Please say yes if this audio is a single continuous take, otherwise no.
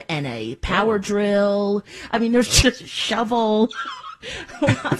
no